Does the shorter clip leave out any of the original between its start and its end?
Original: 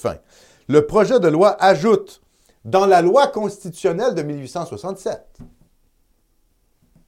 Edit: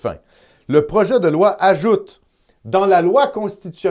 no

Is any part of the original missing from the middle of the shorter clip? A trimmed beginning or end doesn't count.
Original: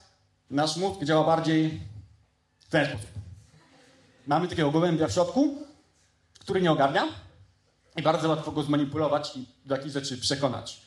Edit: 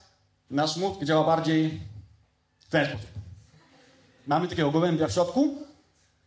no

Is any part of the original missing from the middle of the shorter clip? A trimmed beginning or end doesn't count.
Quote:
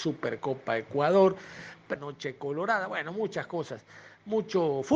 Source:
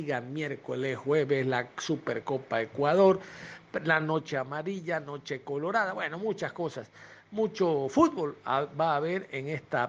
yes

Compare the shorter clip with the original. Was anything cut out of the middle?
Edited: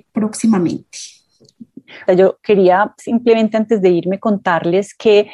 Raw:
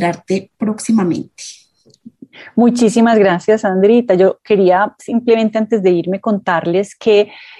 yes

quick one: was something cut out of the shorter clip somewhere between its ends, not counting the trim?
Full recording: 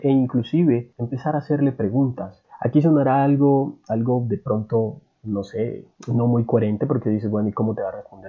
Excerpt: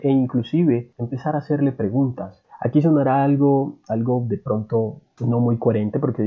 yes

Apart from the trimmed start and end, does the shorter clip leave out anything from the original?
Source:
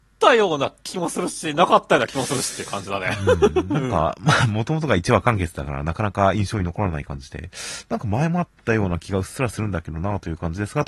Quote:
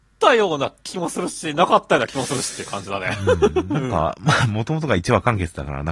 no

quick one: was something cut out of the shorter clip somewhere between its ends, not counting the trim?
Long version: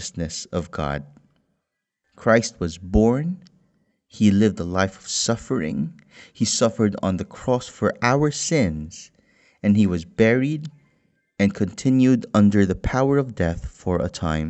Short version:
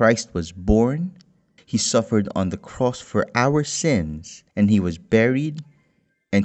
yes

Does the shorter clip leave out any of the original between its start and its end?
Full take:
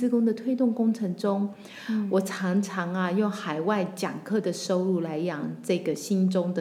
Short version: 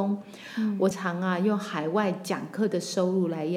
yes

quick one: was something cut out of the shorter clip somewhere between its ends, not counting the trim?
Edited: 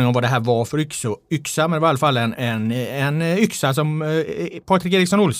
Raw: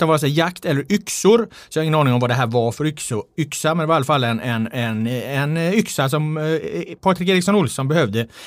yes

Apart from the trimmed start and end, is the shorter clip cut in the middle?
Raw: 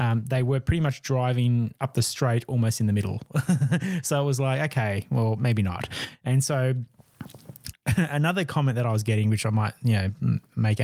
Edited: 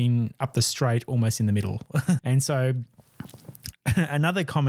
yes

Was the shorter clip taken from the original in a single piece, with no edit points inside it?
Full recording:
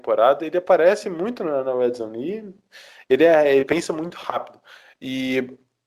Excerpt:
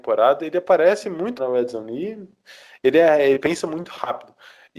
no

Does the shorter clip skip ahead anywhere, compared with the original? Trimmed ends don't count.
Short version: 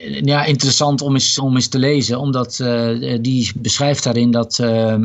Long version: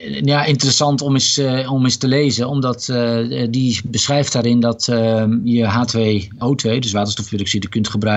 yes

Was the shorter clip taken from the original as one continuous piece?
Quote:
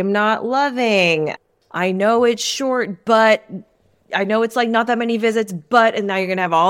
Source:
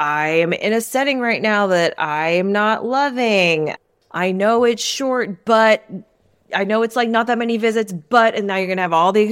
yes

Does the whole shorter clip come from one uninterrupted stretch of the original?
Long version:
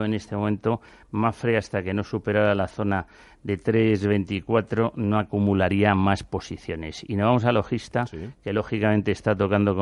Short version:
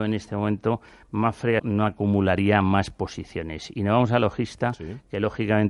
no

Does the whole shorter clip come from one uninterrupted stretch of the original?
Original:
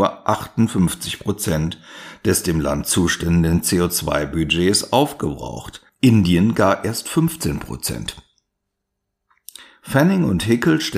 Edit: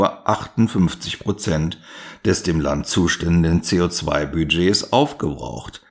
yes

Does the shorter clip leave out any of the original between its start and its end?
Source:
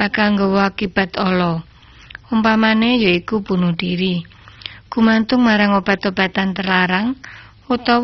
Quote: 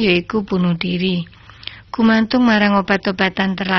no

